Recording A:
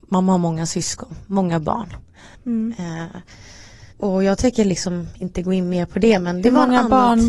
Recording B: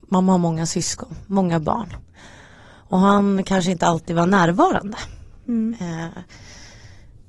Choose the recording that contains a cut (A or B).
A